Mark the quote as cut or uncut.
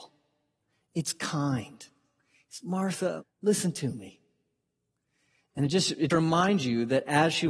cut